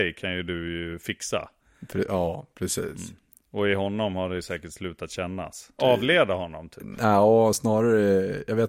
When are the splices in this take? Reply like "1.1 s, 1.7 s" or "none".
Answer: 5.8 s

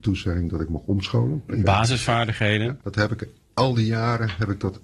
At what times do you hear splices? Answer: 1.5 s, 2.8 s

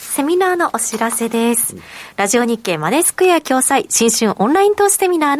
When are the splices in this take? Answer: none

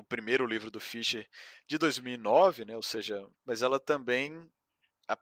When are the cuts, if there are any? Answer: 3.3 s

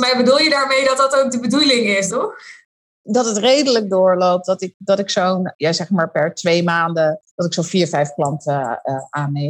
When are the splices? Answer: 2.1 s, 7.3 s

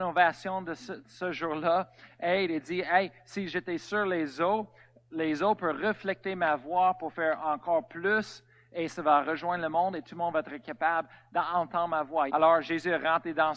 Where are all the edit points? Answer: 12.3 s

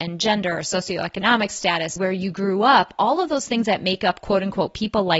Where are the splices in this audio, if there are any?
2.0 s

